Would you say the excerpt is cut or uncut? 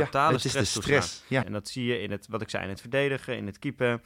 cut